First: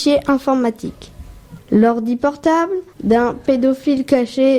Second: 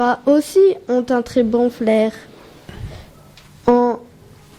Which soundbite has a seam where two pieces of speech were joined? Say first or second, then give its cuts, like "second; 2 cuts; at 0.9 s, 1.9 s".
first; 2 cuts; at 1.6 s, 2.9 s